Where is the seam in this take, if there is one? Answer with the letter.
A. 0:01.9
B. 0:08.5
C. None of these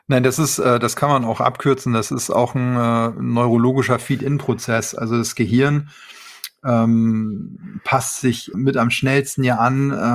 B